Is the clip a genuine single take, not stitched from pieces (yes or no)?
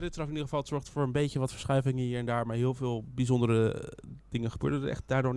yes